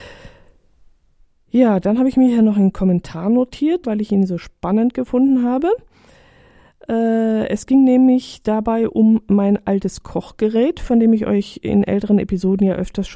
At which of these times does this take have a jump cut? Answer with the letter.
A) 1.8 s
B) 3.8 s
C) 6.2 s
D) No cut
B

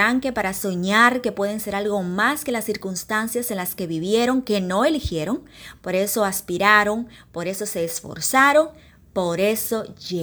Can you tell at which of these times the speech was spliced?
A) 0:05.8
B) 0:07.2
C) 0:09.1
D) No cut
D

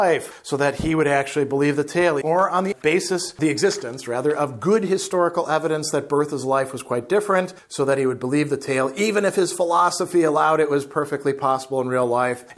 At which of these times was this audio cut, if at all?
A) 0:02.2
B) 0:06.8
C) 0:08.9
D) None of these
A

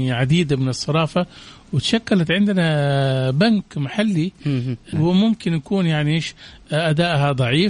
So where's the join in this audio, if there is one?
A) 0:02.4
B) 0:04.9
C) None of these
B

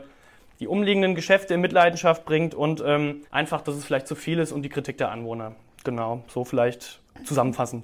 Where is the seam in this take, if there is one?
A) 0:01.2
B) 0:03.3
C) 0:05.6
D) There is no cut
B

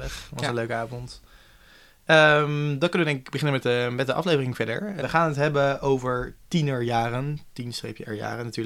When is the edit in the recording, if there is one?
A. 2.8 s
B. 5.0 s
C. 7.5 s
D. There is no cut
B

